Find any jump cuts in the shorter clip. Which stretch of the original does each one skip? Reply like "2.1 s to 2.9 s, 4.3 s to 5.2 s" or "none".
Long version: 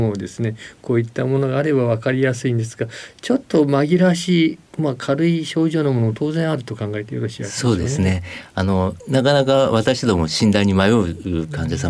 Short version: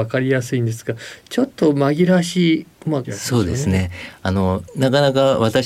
5.0 s to 7.4 s